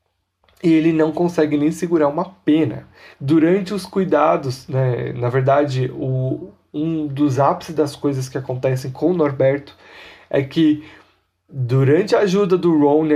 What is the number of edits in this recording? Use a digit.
1